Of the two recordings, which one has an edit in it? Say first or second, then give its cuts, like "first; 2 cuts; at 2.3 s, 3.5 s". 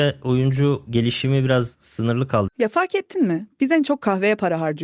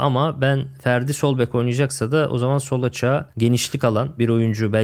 first; 1 cut; at 2.5 s